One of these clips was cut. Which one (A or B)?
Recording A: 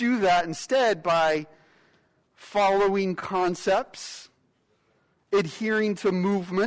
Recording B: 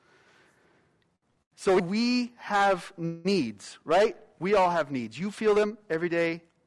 B